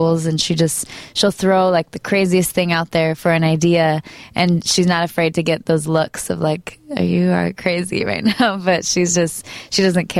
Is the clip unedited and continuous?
yes; 0 cuts

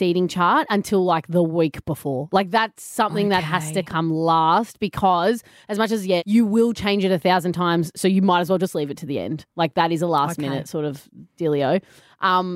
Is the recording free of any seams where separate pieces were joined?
no; 1 cut; at 6.2 s

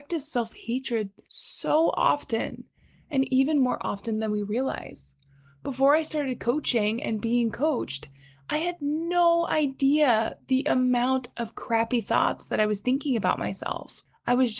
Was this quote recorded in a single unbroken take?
yes; 0 cuts

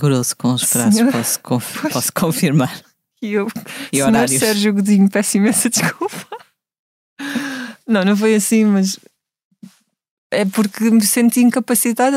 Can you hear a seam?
no; 0 cuts

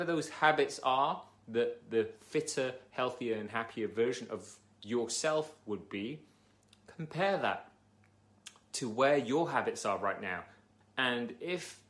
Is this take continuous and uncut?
no; 1 cut; at 10.8 s

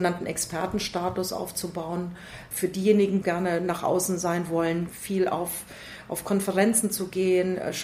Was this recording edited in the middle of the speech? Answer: yes; 2 cuts; at 3.2 s, 4.9 s

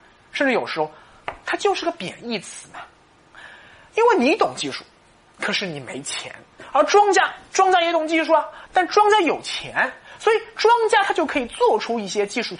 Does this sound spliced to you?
no; 0 cuts

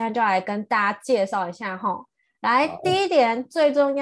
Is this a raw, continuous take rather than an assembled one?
yes; 0 cuts

